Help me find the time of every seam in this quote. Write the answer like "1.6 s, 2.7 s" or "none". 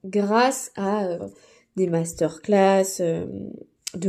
1.2 s